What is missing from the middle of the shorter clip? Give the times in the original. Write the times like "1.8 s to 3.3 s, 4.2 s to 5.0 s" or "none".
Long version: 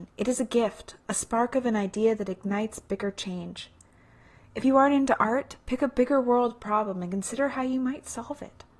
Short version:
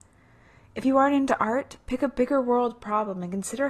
none